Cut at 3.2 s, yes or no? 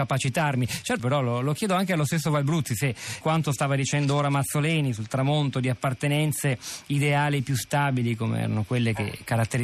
yes